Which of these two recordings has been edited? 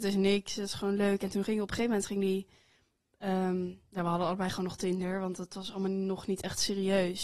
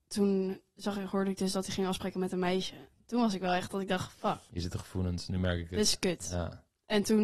second; 1 cut; at 4.5 s

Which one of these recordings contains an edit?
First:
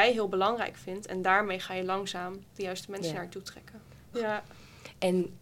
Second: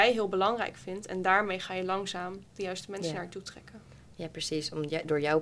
first; 1 cut; at 4.1 s

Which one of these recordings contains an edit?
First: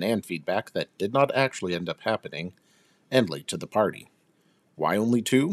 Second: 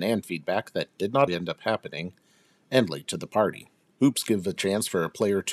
second; 2 cuts; at 1.3 s, 3.9 s

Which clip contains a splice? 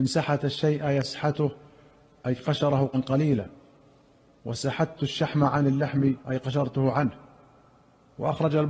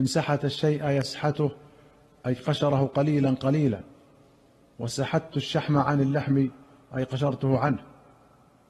first; 2 cuts; at 2.9 s, 6.2 s

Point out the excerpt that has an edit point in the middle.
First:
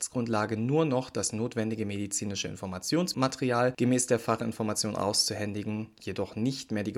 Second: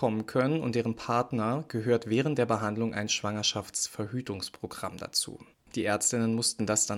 second; 1 cut; at 5.7 s

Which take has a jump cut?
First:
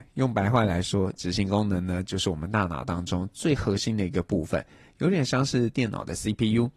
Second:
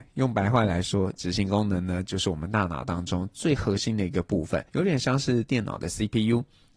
second; 1 cut; at 4.7 s

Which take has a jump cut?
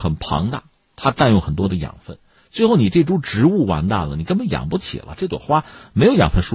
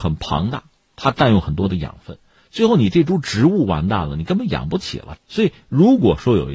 second; 1 cut; at 5.2 s

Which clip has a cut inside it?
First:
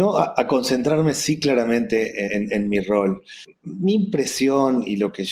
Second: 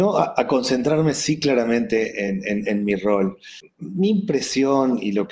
first; 1 cut; at 2.3 s

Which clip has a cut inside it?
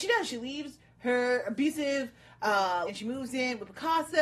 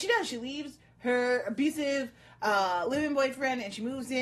first; 1 cut; at 2.9 s

